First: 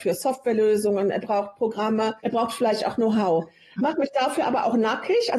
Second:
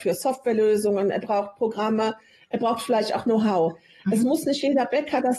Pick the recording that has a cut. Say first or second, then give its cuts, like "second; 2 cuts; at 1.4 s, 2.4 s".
first; 2 cuts; at 2.2 s, 3.8 s